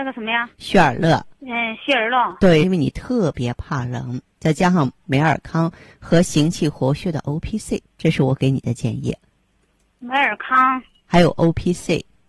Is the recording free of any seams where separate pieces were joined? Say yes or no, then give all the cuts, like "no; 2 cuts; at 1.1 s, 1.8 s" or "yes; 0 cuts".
no; 2 cuts; at 1.3 s, 2.6 s